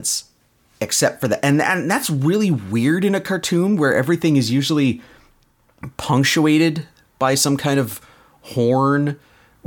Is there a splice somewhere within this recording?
no; 0 cuts

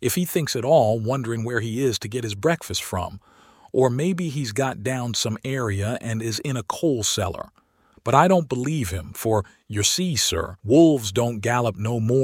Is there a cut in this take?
yes; 2 cuts; at 7.9 s, 10.6 s

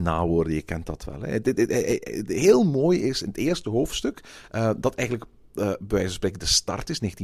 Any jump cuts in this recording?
no; 0 cuts

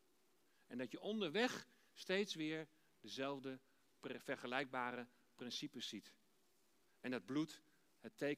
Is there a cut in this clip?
yes; 1 cut; at 6.9 s

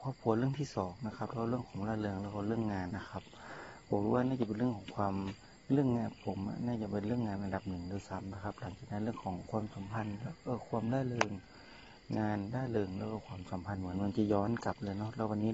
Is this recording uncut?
no; 1 cut; at 2.9 s

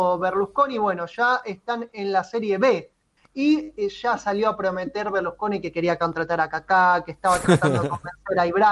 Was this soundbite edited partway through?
yes; 1 cut; at 3.2 s

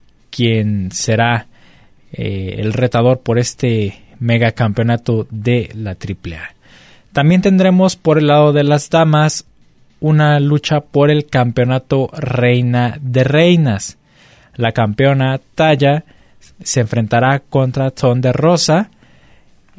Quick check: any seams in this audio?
no; 0 cuts

